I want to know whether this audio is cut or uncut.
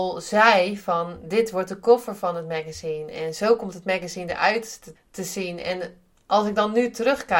cut